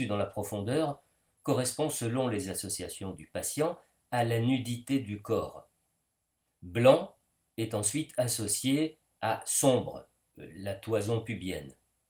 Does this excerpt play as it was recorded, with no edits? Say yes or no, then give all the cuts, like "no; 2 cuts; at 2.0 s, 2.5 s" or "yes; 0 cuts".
yes; 0 cuts